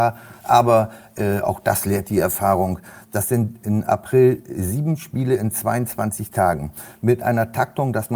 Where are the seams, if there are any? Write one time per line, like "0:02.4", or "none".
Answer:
none